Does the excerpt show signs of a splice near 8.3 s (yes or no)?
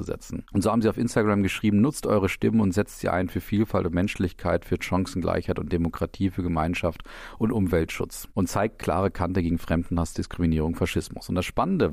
no